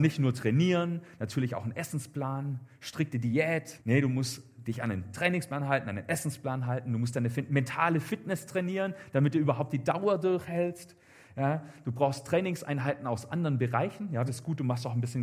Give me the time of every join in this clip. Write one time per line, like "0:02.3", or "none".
0:03.8
0:14.3

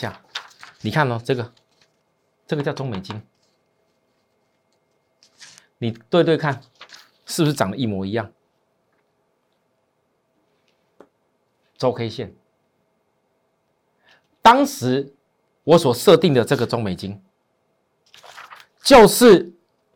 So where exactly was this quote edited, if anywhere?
none

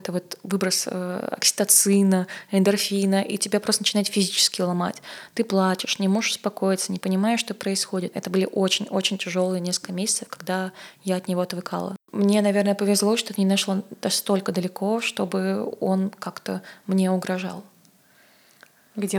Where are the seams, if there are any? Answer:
0:08.1

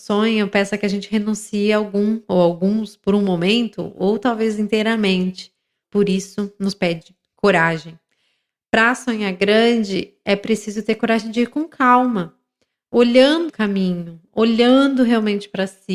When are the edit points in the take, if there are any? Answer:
0:05.8
0:13.5

